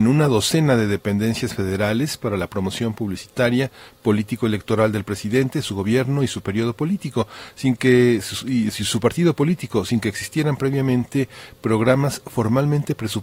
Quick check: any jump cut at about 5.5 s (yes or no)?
no